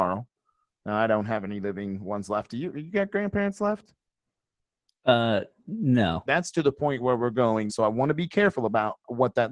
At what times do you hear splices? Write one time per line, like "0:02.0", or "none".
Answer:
0:06.3
0:07.7